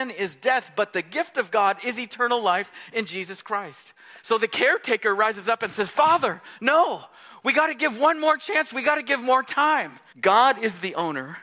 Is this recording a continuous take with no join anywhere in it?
no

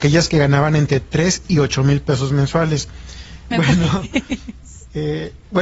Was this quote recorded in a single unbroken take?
no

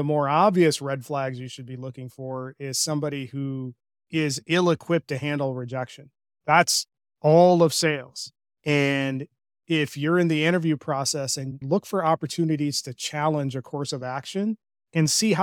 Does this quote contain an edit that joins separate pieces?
yes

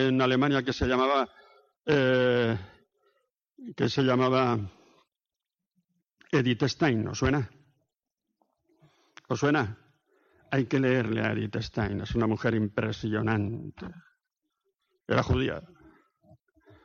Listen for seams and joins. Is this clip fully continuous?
yes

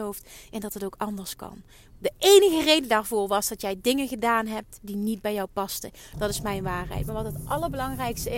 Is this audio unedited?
no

